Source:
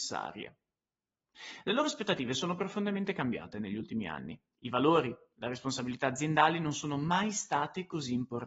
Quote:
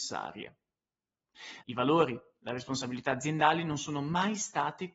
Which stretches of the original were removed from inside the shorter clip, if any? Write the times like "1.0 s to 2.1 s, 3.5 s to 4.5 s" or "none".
1.6 s to 4.6 s